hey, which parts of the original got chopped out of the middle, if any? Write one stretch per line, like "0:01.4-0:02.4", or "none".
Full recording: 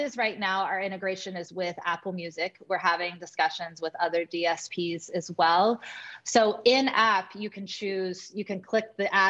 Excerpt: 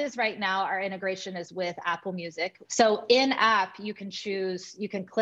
0:02.6-0:06.2